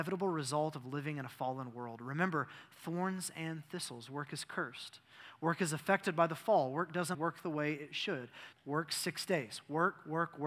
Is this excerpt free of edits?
no; 2 cuts; at 7.1 s, 8.5 s

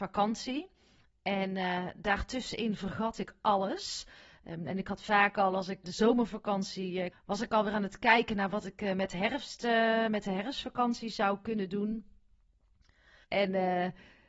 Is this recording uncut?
no; 3 cuts; at 5.8 s, 7.1 s, 13.2 s

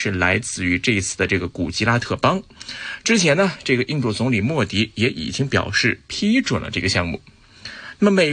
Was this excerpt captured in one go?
yes; 0 cuts

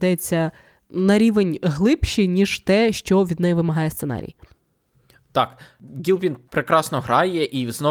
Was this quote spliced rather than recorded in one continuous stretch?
no; 0 cuts

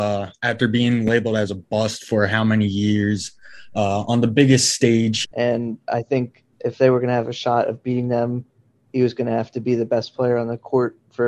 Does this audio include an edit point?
yes; 2 cuts; at 5.2 s, 6.5 s

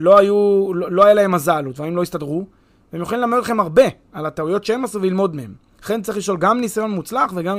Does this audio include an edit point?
no; 0 cuts

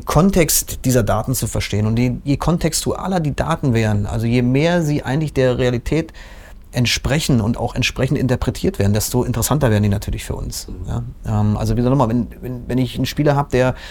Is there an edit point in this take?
no; 0 cuts

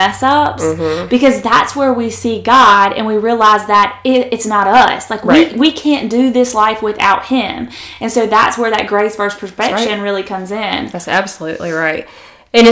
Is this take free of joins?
yes; 0 cuts

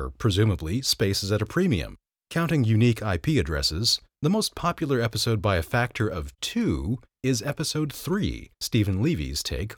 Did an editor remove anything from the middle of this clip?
yes; 2 cuts; at 2.2 s, 8.5 s

